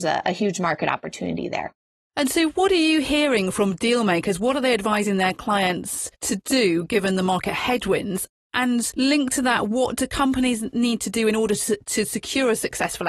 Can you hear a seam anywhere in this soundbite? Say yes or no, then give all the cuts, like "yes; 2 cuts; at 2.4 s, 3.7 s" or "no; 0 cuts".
no; 0 cuts